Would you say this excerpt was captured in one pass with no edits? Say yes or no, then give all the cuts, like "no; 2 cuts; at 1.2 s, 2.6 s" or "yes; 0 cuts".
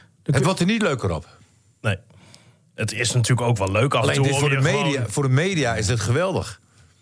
yes; 0 cuts